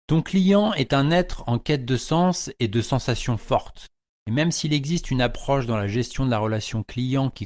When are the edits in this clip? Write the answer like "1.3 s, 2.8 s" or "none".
4.1 s